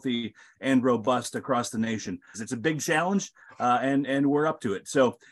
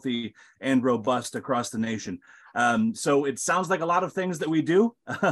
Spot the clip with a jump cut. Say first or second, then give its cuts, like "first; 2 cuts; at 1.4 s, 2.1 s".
first; 1 cut; at 2.3 s